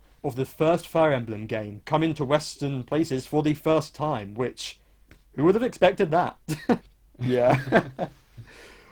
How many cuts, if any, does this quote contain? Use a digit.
2